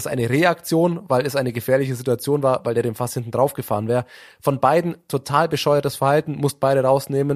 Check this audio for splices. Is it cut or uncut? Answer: uncut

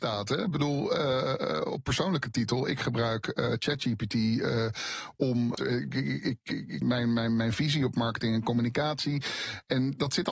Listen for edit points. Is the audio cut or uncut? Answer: cut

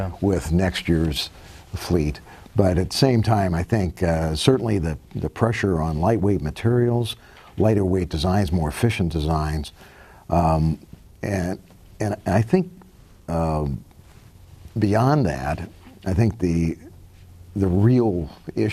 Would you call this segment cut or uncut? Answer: uncut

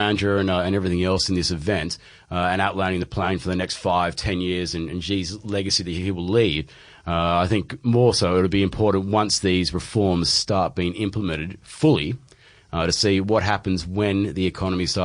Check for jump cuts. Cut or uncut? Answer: uncut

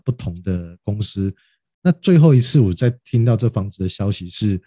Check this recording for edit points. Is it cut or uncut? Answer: uncut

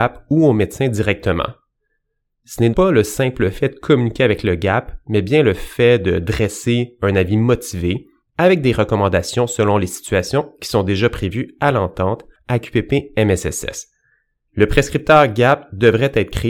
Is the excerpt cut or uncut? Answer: cut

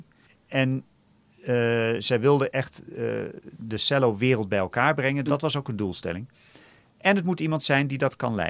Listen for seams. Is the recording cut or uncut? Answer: cut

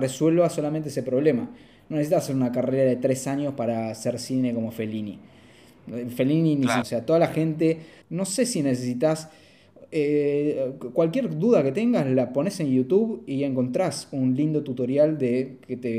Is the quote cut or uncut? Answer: cut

